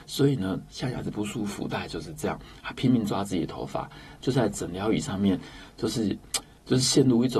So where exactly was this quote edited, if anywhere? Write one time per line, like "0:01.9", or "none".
0:04.2